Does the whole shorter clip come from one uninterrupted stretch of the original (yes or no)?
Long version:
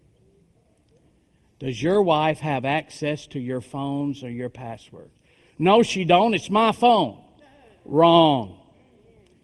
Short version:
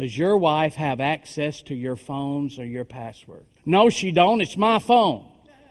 no